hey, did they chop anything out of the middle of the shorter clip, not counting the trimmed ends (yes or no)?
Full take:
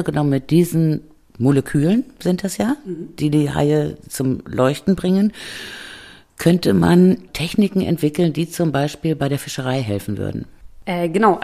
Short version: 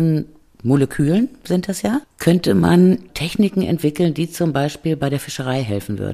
yes